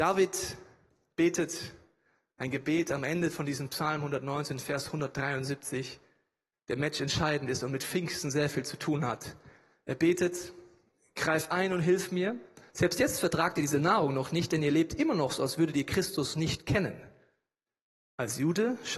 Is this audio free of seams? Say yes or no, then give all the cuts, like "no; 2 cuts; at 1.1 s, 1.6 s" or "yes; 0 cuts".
no; 1 cut; at 12.7 s